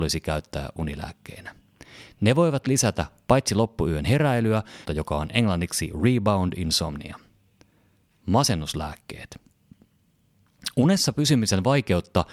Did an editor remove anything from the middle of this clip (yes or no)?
yes